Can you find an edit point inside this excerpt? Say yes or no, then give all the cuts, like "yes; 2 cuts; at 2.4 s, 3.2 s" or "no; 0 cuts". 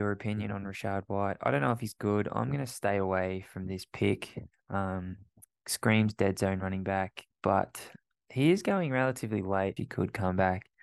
yes; 2 cuts; at 7.3 s, 9.8 s